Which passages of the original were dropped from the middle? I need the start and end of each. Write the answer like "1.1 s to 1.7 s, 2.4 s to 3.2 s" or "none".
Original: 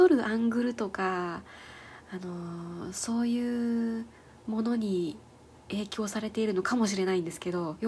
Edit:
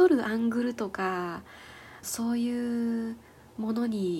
2.0 s to 2.9 s